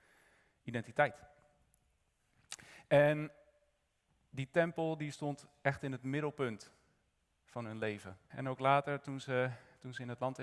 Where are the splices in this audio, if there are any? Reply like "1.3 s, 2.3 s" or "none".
8.3 s